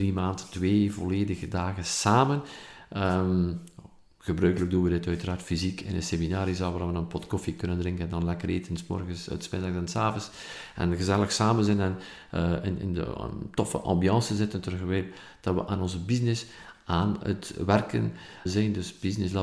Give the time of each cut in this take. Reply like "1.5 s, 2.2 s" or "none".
12.8 s, 18.5 s